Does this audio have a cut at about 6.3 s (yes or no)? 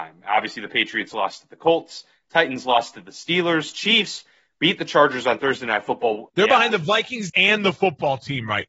yes